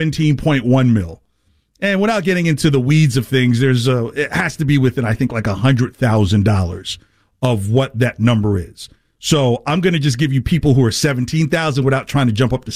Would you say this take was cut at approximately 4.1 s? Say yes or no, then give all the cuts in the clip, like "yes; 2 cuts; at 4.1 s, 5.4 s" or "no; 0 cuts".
no; 0 cuts